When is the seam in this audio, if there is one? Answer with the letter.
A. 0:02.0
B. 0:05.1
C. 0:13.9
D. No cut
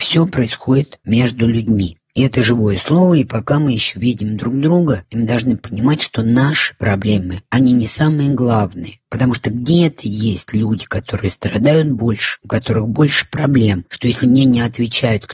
D